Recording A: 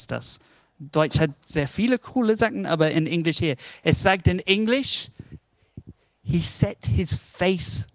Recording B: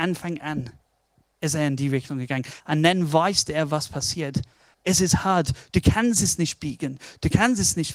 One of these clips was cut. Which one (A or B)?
B